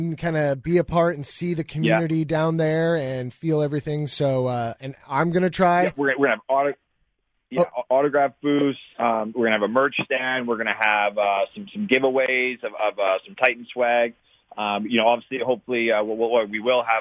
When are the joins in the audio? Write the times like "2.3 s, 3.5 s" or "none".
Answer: none